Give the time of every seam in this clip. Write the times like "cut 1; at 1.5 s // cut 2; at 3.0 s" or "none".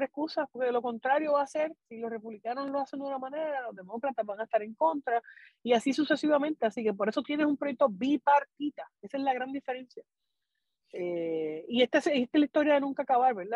none